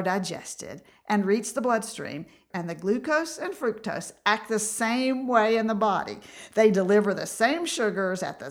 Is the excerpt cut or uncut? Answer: cut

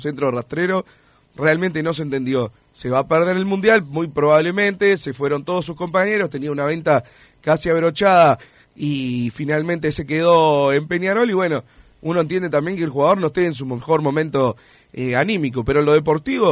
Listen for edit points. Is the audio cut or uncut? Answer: cut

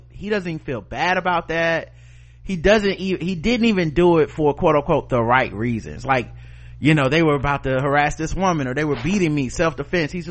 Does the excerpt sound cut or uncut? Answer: uncut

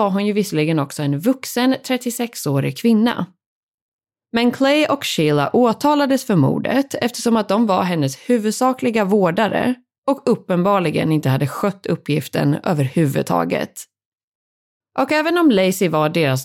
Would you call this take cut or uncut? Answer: cut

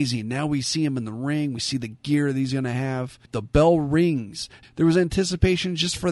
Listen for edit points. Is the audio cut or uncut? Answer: cut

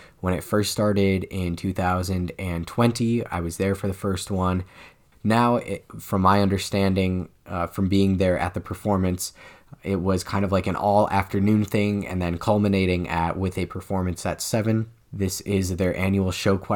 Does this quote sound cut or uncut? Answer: cut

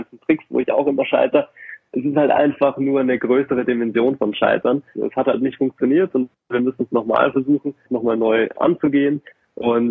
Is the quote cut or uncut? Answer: cut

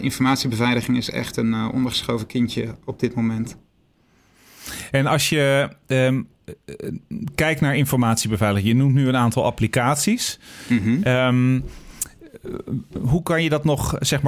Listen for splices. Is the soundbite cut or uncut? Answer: uncut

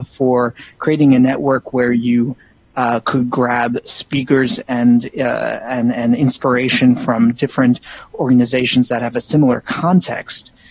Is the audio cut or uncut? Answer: uncut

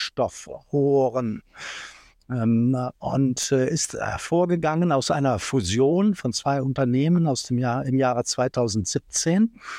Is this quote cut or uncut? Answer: uncut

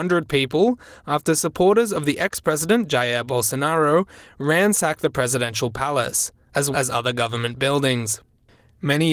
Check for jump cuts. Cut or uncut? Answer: cut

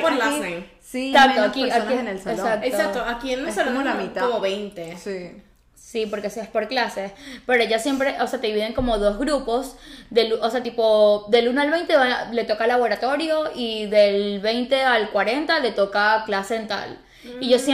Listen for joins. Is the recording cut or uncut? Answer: cut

